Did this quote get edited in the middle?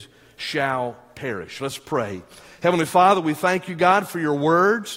no; 0 cuts

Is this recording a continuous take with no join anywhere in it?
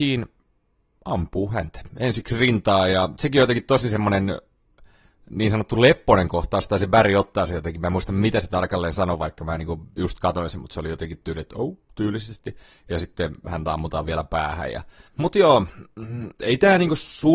no; 2 cuts; at 11.8 s, 15.1 s

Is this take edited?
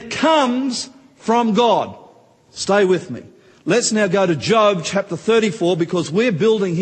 no; 0 cuts

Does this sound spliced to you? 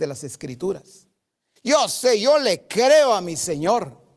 yes; 1 cut; at 1.6 s

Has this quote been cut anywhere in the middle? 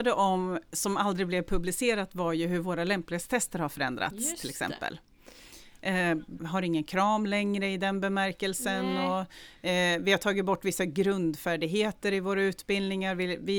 yes; 1 cut; at 6.4 s

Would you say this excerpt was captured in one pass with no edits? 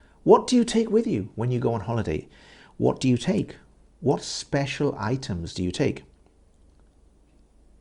yes; 0 cuts

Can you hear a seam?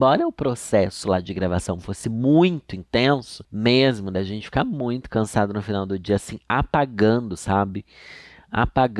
no; 0 cuts

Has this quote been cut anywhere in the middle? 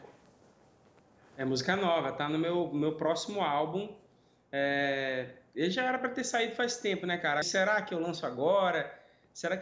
yes; 1 cut; at 7.4 s

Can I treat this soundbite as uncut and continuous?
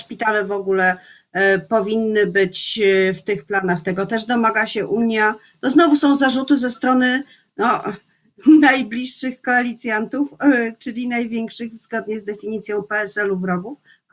yes; 0 cuts

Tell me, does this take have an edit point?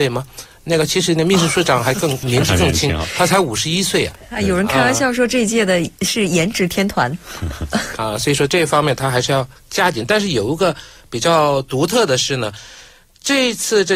yes; 2 cuts; at 2.2 s, 8.0 s

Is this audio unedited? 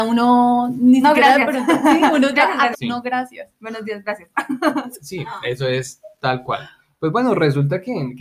no; 1 cut; at 2.7 s

